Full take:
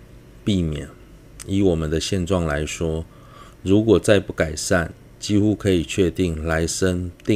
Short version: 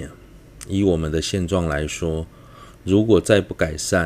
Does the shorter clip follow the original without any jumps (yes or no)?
yes